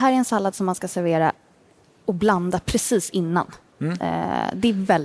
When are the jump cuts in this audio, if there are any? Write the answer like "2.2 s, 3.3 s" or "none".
none